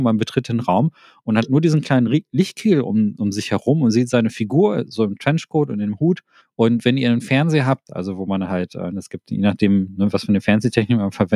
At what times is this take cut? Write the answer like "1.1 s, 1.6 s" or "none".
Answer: 6.4 s, 7.9 s